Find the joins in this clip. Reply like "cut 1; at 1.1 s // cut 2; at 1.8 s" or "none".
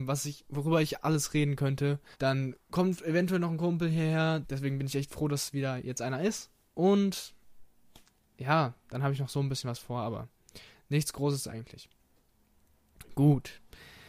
cut 1; at 2.1 s // cut 2; at 4.4 s